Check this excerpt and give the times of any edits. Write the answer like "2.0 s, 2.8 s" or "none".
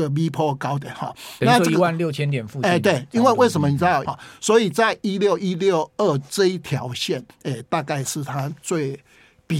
4.0 s, 7.3 s